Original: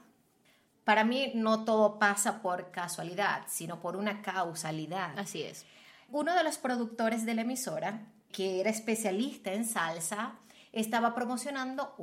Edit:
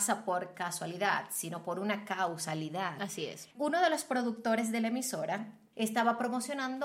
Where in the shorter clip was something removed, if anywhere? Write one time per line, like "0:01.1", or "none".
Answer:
0:03.5
0:05.7